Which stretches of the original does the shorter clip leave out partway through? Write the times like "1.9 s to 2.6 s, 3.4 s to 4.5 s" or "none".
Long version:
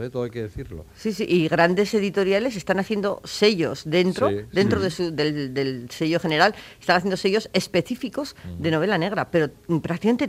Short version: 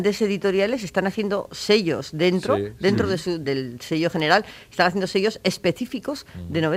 5.2 s to 5.5 s